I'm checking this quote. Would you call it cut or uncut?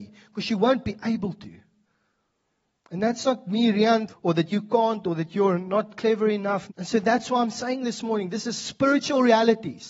cut